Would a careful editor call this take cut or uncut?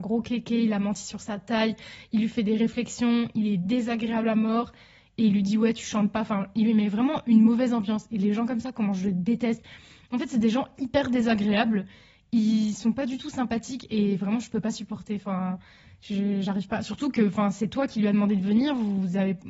uncut